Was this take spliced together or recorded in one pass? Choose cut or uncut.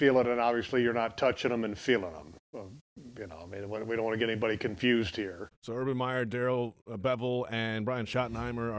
cut